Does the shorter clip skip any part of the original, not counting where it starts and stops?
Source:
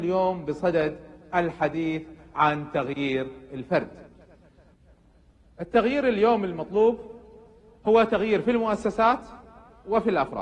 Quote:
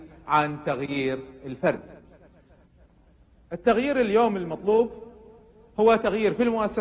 no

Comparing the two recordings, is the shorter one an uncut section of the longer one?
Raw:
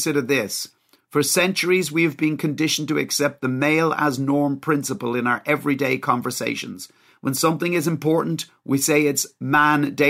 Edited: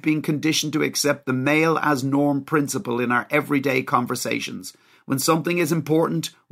yes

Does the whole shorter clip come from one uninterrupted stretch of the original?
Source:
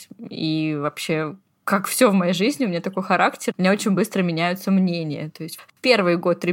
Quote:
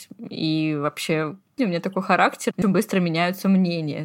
no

